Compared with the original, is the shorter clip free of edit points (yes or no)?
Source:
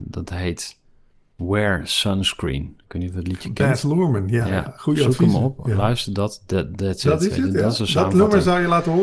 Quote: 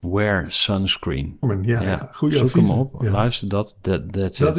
no